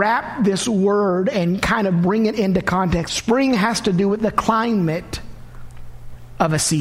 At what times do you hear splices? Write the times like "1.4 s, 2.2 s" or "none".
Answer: 3.1 s